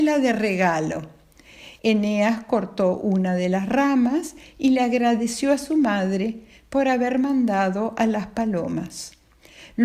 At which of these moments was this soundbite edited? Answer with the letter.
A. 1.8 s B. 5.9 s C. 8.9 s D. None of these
A